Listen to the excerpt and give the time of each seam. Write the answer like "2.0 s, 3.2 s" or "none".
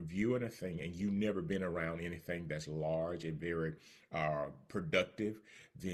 none